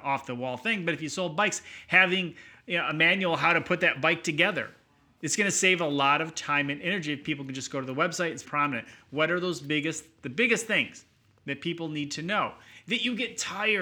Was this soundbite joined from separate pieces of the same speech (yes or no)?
yes